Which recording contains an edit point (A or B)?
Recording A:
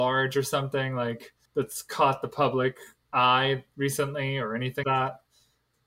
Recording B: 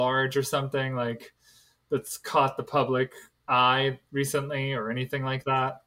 A